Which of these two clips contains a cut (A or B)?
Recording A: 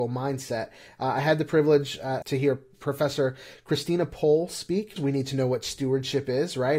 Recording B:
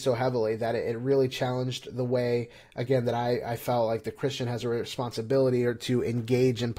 A